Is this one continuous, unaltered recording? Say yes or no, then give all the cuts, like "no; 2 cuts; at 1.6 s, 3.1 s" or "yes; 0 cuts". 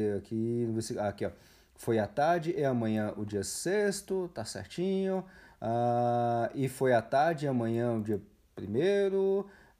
yes; 0 cuts